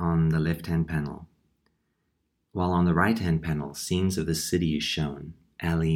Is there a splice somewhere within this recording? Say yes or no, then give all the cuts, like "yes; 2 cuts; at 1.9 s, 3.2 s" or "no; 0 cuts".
no; 0 cuts